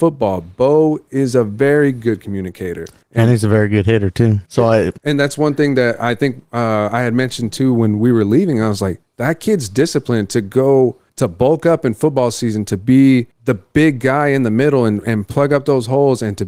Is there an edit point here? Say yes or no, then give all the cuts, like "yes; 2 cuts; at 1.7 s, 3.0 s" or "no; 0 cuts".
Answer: yes; 1 cut; at 4.4 s